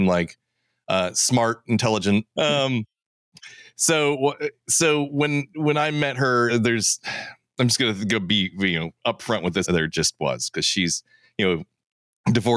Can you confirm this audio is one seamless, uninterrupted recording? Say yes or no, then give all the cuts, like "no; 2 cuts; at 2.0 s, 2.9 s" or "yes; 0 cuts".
no; 3 cuts; at 2.4 s, 6.5 s, 9.6 s